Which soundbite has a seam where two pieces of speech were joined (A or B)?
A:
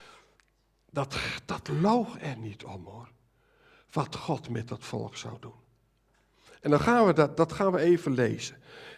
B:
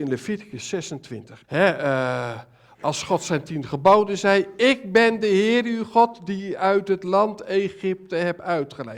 B